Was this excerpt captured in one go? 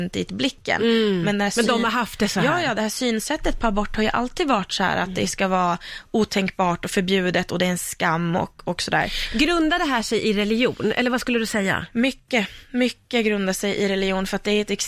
yes; 0 cuts

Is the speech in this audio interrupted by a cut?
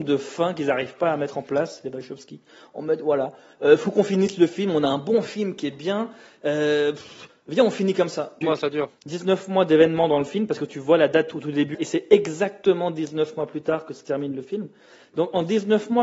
yes; 2 cuts; at 8.4 s, 11.7 s

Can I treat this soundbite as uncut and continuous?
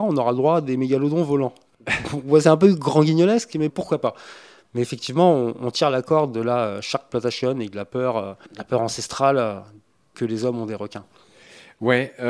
no; 2 cuts; at 3.7 s, 8.4 s

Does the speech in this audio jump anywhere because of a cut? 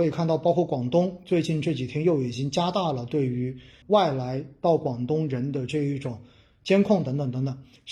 yes; 1 cut; at 3.8 s

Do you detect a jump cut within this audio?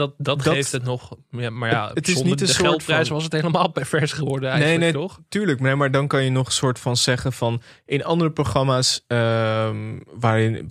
no; 0 cuts

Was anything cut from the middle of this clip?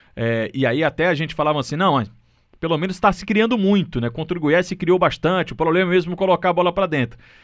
no; 0 cuts

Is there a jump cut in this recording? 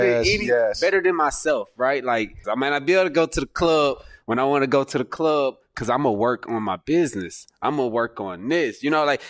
yes; 1 cut; at 2.4 s

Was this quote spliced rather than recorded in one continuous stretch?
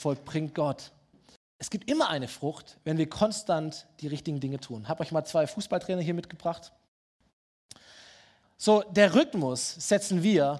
yes; 2 cuts; at 1.4 s, 8.4 s

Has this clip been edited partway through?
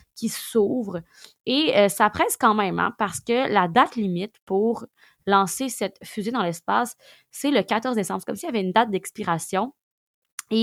no; 0 cuts

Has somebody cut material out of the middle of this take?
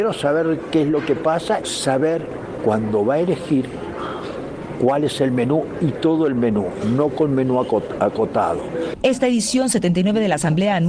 yes; 1 cut; at 1.6 s

